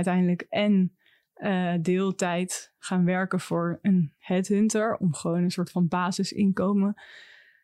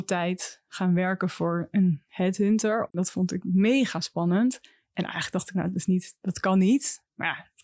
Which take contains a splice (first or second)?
second